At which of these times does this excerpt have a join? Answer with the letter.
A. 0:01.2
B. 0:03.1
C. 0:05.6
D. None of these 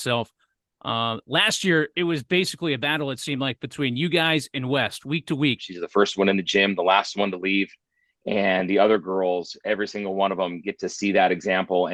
C